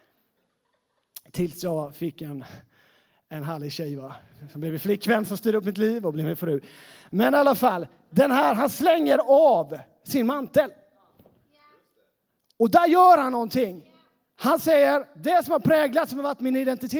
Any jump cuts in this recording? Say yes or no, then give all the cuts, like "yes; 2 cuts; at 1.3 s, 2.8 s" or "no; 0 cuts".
no; 0 cuts